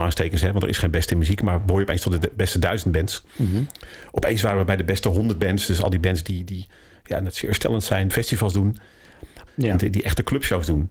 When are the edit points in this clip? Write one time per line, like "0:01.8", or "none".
0:08.1
0:09.5